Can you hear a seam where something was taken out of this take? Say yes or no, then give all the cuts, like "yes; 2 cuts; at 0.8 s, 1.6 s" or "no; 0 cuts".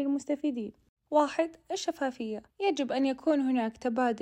yes; 2 cuts; at 1.1 s, 2.5 s